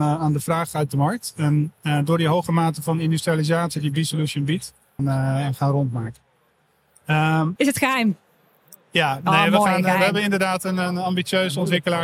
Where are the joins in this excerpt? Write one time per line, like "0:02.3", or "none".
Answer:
0:05.0
0:07.6